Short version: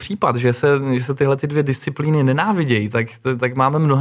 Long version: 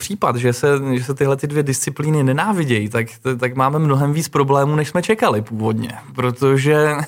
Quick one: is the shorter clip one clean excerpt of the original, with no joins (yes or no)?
yes